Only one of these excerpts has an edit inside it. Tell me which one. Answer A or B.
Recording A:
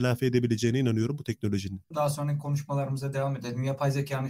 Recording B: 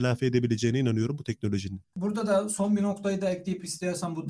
A